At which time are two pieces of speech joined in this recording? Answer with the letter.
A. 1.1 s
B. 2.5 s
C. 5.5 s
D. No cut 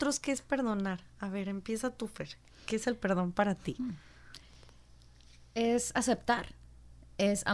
D